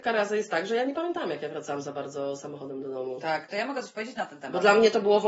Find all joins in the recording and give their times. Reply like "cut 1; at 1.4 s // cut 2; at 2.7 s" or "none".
cut 1; at 3.5 s